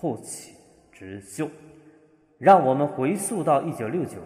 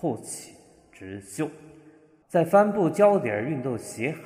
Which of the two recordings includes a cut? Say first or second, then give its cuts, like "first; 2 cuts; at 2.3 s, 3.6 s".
second; 1 cut; at 2.2 s